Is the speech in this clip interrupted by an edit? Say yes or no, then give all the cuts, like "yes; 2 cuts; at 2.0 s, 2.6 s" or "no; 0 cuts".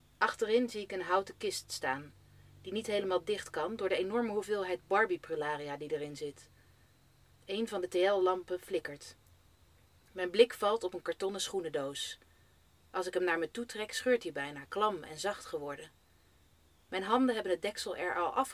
no; 0 cuts